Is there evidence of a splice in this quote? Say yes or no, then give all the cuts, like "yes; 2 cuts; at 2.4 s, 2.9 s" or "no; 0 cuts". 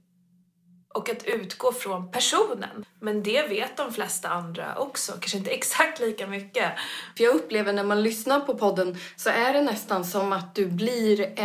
yes; 2 cuts; at 2.8 s, 7.2 s